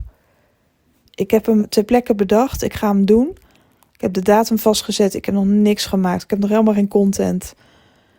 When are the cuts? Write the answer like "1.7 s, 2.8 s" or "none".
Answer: 1.6 s